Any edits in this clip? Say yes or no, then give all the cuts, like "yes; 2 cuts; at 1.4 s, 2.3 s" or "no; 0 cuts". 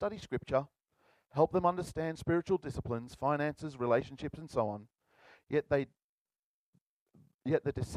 no; 0 cuts